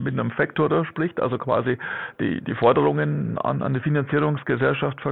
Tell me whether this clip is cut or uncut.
uncut